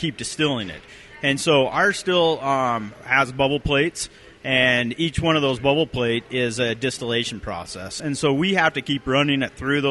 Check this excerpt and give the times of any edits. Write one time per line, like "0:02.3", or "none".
none